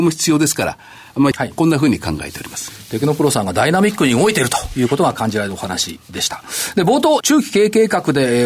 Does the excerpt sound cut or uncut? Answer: cut